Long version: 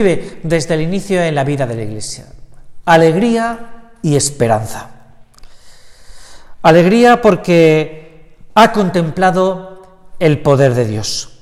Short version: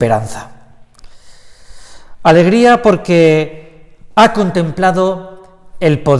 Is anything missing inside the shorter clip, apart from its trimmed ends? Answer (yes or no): no